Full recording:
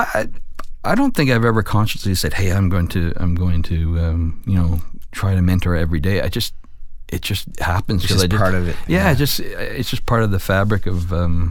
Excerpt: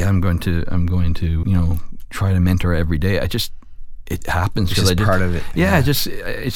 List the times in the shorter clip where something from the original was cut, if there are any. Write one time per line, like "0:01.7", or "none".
0:01.4
0:04.2